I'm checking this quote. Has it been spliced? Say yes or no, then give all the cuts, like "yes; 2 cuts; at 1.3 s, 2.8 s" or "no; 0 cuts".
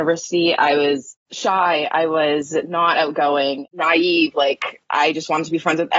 no; 0 cuts